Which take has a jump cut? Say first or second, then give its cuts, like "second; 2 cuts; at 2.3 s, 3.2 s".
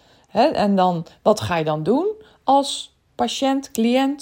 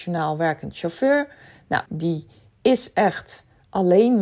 second; 1 cut; at 1.9 s